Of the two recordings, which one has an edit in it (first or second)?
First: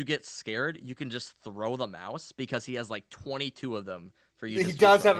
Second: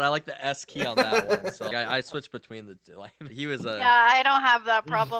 second